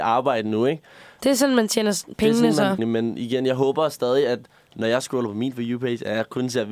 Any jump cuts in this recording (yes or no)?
yes